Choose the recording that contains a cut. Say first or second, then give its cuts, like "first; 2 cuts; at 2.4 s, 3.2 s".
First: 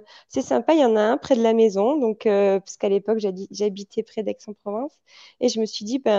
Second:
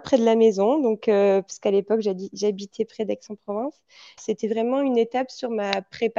second; 1 cut; at 4.2 s